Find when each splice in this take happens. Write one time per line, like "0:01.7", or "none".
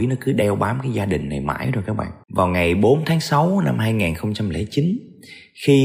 0:02.2